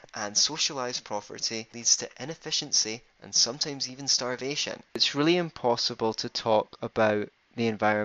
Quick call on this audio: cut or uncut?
cut